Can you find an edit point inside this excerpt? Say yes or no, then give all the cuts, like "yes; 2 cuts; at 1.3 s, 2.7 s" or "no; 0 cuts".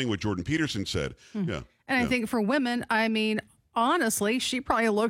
yes; 1 cut; at 1.5 s